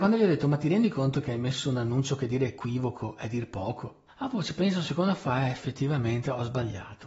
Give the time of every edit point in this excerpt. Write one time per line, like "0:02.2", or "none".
0:04.1